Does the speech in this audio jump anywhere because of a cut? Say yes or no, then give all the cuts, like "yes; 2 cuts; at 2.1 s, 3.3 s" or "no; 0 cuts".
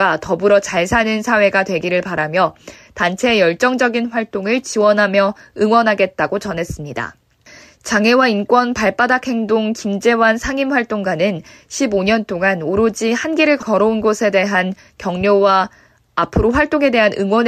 no; 0 cuts